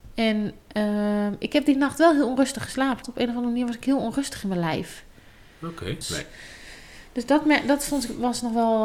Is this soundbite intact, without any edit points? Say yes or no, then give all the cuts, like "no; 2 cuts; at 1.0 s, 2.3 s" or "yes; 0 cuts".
no; 2 cuts; at 3.0 s, 6.0 s